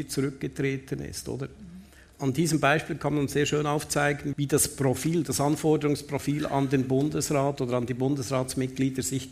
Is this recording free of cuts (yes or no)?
no